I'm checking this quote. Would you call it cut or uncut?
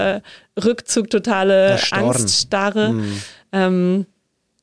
uncut